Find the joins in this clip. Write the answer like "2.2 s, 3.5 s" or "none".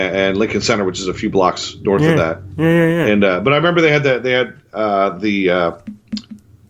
none

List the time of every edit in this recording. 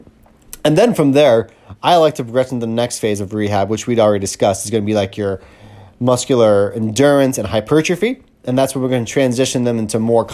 none

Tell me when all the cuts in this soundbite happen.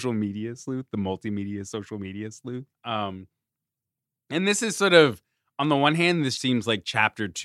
2.7 s, 6.4 s

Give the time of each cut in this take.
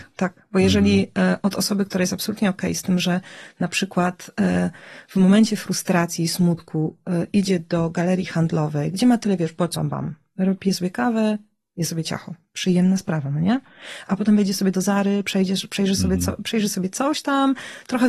9.8 s

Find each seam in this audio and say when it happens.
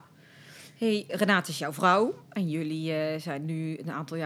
1.1 s

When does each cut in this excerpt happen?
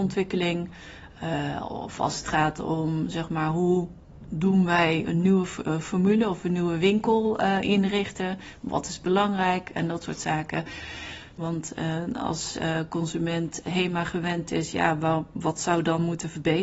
5.0 s, 11.4 s

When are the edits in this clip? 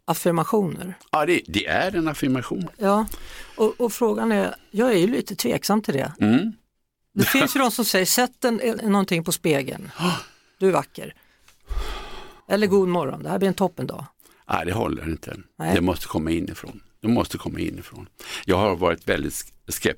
8.8 s, 12.4 s

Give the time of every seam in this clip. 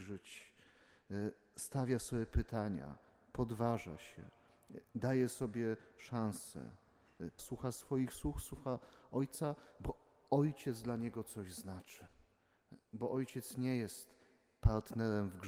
7.4 s

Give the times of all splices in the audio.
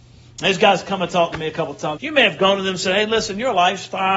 2.0 s

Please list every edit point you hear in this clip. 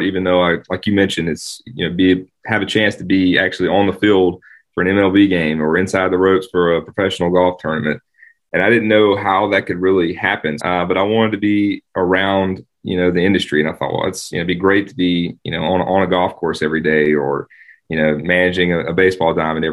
10.6 s

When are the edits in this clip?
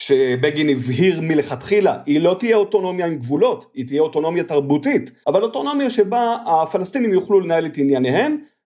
5.2 s

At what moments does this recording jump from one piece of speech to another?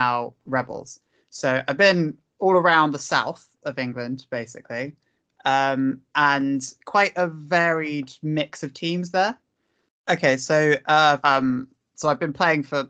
9.9 s, 11.2 s

